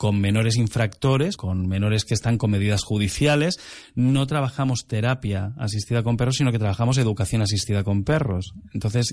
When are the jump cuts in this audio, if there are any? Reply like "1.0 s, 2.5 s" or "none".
1.4 s